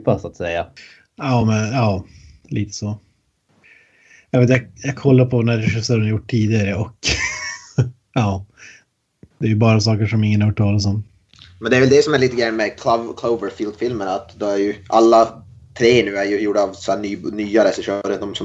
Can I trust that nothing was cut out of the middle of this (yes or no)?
yes